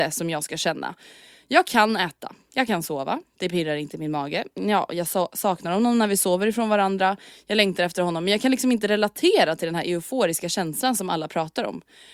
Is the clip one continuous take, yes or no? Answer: yes